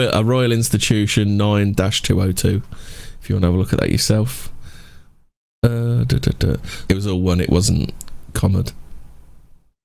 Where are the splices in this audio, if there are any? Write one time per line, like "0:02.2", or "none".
0:06.9